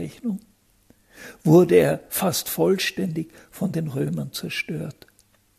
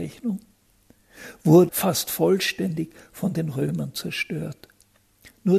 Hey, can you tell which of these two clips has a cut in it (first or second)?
second